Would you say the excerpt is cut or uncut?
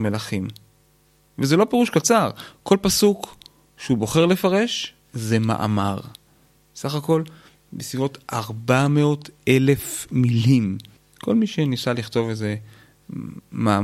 cut